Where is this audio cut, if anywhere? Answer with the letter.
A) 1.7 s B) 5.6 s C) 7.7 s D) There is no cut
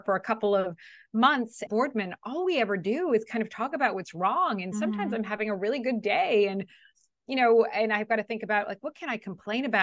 A